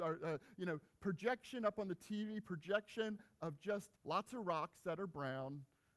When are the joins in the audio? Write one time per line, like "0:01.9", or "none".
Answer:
0:03.9